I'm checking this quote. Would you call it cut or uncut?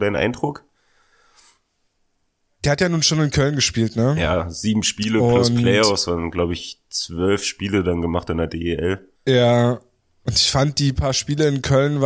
cut